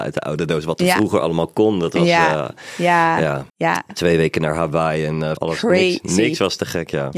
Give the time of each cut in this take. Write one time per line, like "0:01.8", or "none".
0:03.5
0:05.4

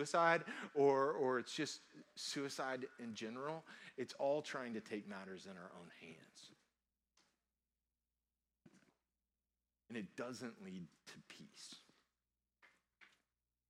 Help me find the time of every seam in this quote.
none

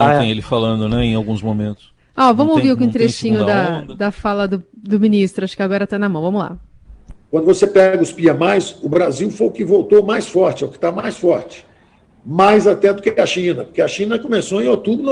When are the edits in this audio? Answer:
none

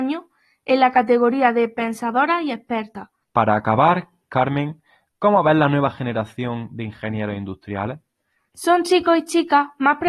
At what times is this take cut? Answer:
0:03.2

